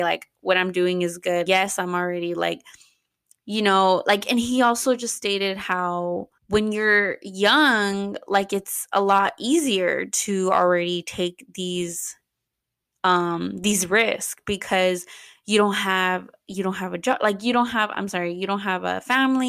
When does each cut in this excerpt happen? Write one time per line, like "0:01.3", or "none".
0:01.5
0:06.4